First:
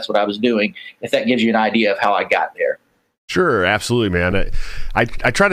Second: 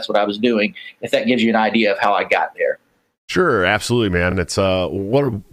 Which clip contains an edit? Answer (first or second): first